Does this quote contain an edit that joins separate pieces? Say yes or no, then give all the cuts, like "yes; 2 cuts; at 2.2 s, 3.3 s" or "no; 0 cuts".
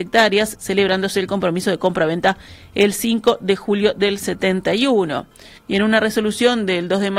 yes; 1 cut; at 5.6 s